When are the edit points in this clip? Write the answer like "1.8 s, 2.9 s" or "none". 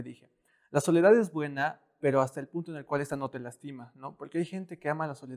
none